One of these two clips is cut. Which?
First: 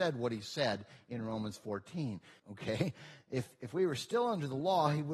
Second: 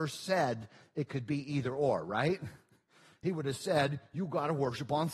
first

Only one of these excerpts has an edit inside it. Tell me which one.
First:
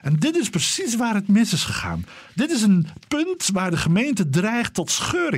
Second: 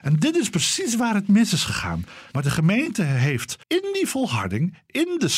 second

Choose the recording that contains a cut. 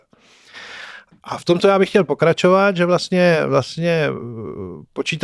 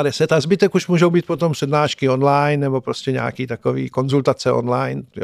first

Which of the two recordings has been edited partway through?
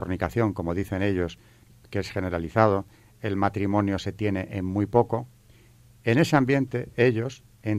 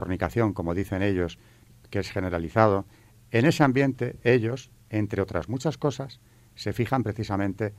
second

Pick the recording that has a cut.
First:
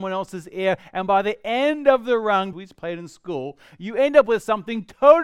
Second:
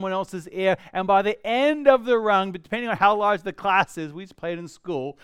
first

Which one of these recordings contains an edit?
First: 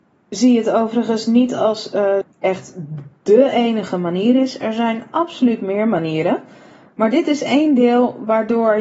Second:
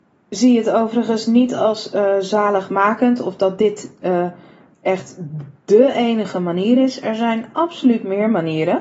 first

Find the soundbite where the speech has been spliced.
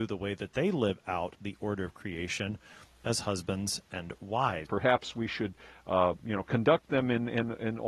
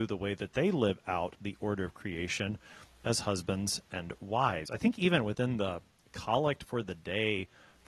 first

